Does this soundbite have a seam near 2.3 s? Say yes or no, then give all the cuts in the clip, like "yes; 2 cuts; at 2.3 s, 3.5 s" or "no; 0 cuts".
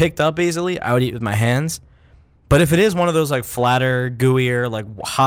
no; 0 cuts